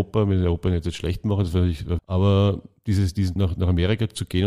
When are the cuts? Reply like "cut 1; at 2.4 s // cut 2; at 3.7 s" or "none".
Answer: cut 1; at 2.0 s // cut 2; at 3.4 s